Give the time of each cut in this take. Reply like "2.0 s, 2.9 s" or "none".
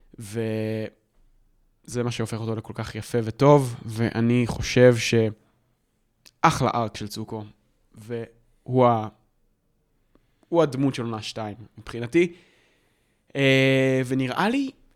none